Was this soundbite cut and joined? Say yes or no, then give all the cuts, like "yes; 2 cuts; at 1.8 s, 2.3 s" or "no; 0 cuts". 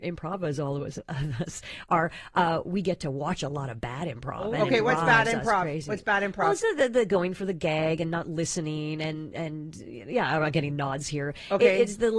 no; 0 cuts